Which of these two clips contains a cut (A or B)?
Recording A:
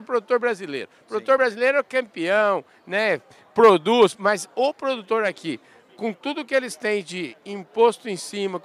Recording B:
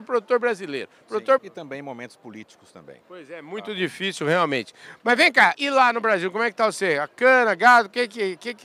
B